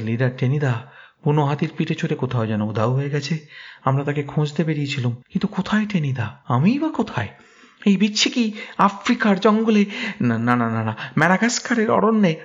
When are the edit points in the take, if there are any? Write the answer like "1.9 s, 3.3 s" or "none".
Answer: 5.2 s, 6.4 s